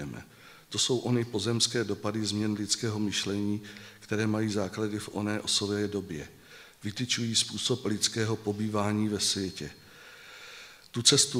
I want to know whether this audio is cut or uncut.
uncut